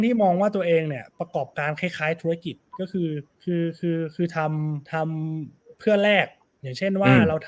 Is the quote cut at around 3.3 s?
yes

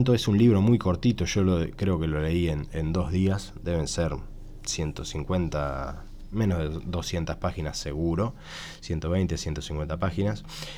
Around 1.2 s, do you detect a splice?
no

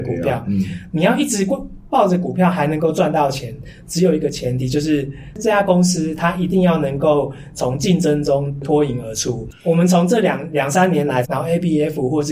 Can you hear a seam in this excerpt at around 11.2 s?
yes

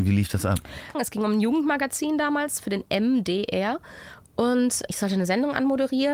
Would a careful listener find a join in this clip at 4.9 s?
yes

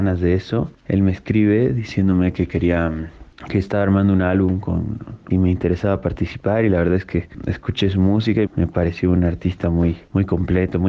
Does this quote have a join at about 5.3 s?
yes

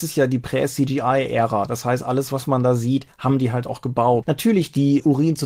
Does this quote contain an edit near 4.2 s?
yes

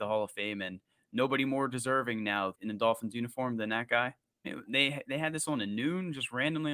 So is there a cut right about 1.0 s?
no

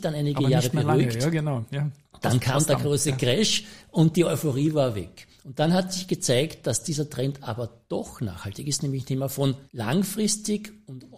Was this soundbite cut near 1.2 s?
no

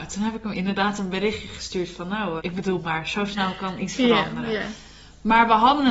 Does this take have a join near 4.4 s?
no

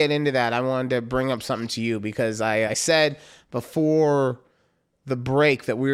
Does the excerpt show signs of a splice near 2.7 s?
yes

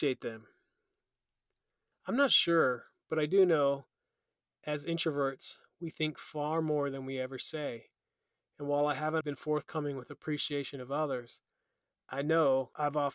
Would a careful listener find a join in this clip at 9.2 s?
yes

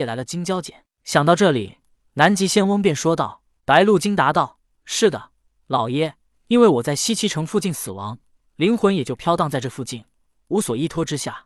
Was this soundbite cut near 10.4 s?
no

